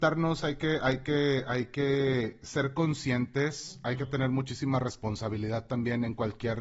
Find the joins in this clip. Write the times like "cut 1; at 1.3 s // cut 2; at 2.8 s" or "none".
none